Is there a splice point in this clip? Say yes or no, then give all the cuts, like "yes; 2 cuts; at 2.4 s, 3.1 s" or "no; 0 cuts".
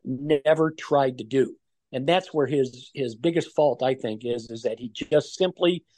no; 0 cuts